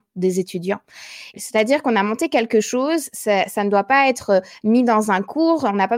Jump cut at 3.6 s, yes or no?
no